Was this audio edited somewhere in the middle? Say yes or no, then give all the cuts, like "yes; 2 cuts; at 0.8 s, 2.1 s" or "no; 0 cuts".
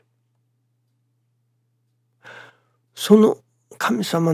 no; 0 cuts